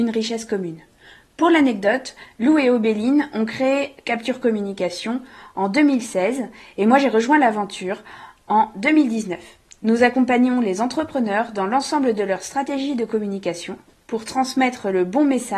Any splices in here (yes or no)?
no